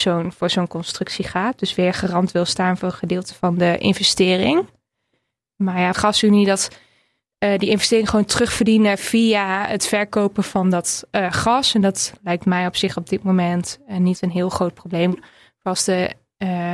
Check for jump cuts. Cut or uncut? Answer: cut